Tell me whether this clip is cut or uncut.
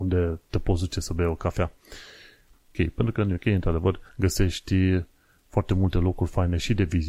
cut